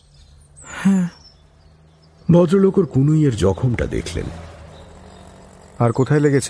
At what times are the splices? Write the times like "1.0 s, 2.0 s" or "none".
none

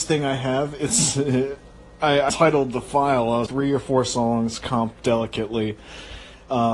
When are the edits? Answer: 2.3 s, 3.5 s

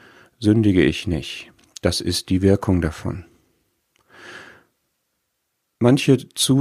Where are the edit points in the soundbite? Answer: none

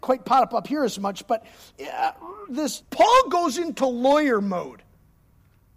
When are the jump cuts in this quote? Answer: 2.8 s

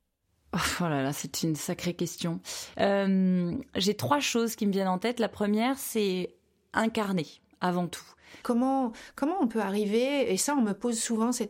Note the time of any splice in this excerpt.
2.7 s, 8.4 s

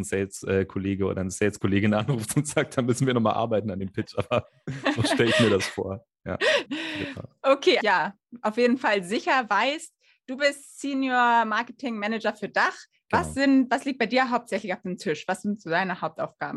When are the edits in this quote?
6.7 s, 7.8 s

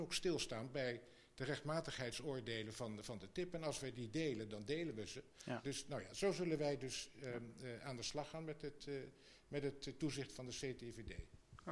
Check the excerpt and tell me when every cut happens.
5.6 s

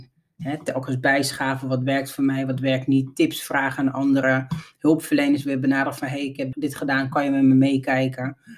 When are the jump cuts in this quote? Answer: 6.5 s

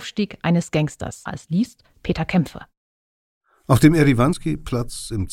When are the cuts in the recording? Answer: 1.3 s

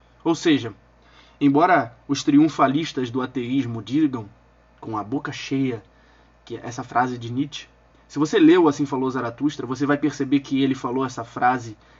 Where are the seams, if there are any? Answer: none

